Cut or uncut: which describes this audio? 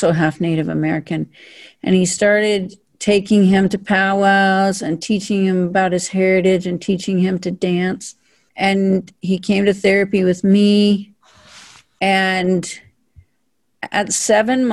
uncut